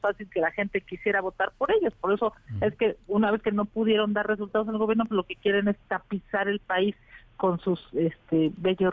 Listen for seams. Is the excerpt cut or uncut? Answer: uncut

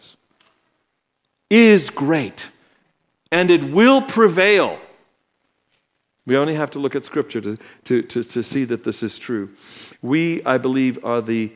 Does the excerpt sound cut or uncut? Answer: uncut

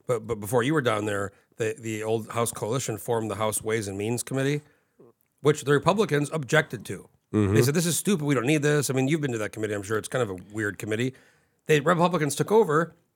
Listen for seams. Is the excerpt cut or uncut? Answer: uncut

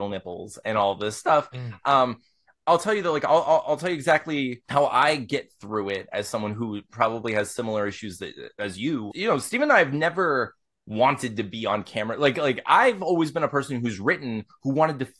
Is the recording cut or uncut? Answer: cut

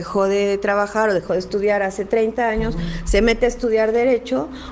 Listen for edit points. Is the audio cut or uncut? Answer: uncut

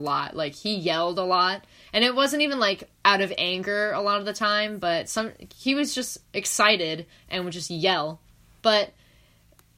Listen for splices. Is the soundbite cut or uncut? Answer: cut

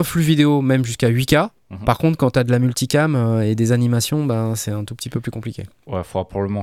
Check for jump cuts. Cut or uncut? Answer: cut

